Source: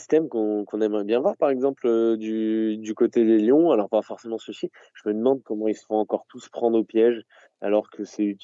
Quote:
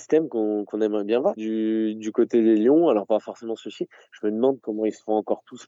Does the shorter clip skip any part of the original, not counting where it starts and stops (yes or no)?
yes